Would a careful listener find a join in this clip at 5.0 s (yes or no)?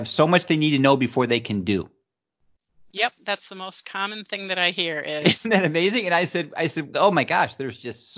no